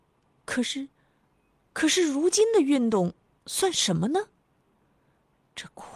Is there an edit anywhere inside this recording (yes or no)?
no